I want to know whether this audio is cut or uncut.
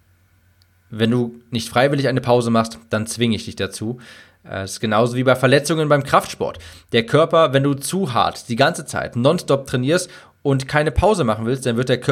uncut